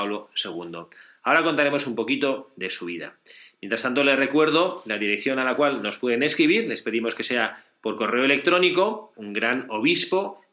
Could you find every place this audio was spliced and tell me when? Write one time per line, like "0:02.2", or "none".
0:09.1